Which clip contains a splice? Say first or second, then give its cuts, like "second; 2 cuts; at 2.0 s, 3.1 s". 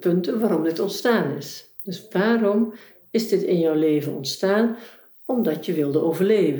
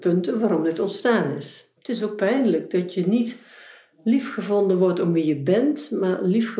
second; 1 cut; at 1.8 s